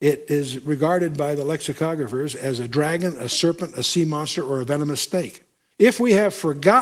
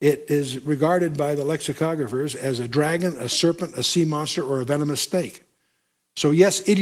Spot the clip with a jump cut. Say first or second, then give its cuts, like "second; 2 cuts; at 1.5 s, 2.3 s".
first; 1 cut; at 5.7 s